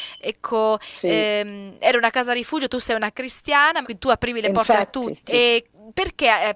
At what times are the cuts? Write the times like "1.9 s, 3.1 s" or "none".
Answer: 3.8 s, 5.3 s